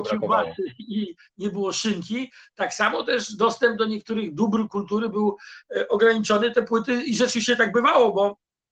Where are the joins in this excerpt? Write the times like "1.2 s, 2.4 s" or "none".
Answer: 6.5 s

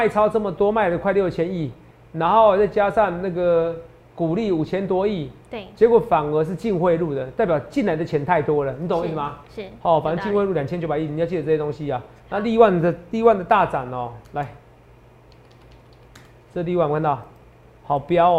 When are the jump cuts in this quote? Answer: none

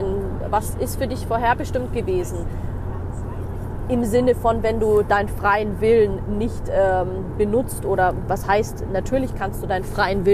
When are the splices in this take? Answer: none

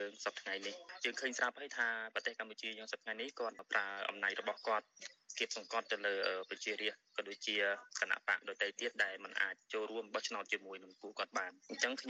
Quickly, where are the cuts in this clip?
none

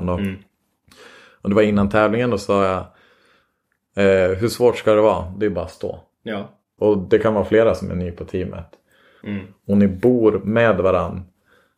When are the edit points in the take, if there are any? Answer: 6.8 s, 9.2 s

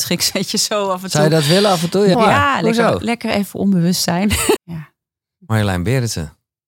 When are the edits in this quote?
2.1 s, 4.6 s

